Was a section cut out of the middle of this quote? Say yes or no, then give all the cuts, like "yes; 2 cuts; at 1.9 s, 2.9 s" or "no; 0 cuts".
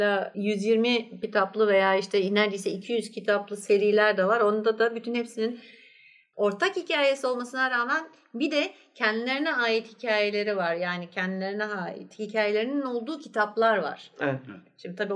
no; 0 cuts